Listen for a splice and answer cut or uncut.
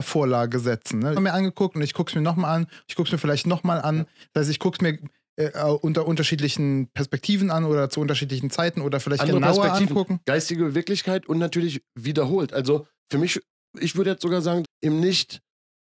cut